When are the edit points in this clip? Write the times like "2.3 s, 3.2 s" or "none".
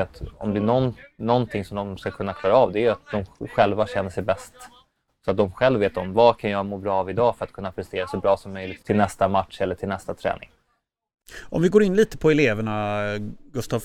8.8 s